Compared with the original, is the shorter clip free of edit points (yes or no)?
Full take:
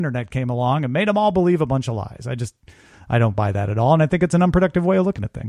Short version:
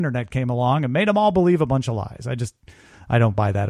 yes